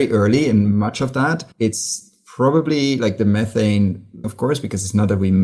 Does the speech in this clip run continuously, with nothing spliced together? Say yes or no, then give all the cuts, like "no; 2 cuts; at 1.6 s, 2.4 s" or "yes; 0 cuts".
no; 2 cuts; at 1.5 s, 4.2 s